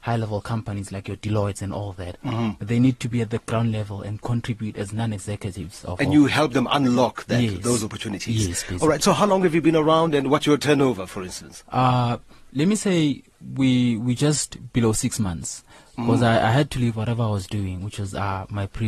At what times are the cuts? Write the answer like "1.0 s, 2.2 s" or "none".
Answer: none